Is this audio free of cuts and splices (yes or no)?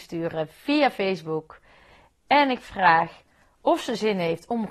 yes